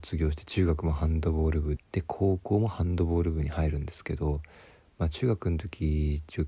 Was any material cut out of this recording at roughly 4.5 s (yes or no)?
no